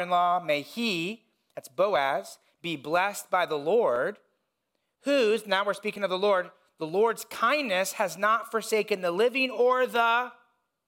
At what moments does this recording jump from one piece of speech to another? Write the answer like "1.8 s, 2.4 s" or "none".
none